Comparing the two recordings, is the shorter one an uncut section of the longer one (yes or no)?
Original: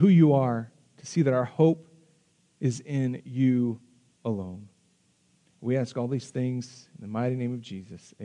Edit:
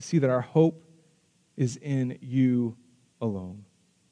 yes